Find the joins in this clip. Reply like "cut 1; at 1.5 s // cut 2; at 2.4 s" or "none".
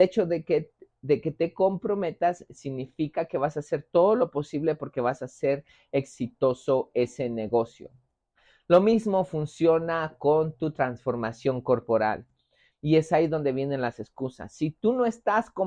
cut 1; at 12.7 s